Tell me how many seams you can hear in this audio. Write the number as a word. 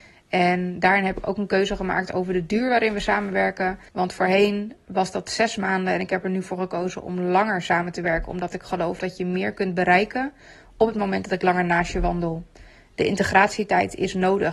one